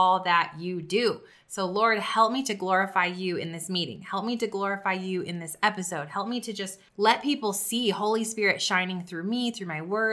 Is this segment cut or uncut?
cut